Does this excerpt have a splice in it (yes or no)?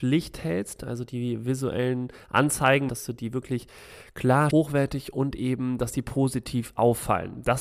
yes